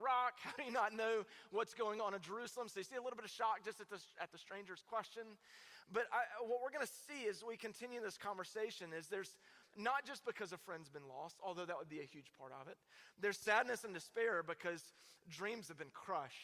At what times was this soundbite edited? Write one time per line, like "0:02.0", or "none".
0:09.6